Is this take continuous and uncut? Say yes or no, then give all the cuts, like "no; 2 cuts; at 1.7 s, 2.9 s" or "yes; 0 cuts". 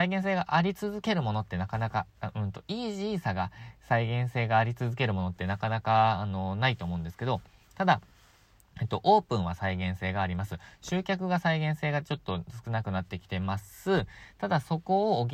yes; 0 cuts